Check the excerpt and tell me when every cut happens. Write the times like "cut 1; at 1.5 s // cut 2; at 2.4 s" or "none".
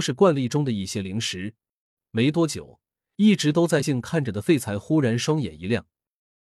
cut 1; at 2.0 s // cut 2; at 3.8 s